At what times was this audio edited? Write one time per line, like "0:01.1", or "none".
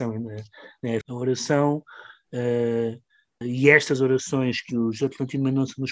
0:01.0
0:03.4